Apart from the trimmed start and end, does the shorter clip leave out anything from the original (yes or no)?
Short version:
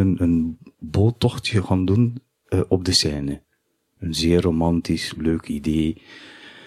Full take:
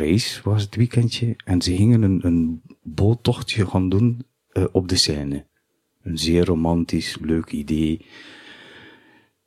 no